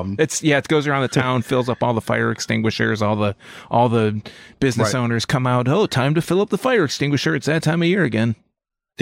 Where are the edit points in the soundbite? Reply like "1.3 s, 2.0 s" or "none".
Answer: none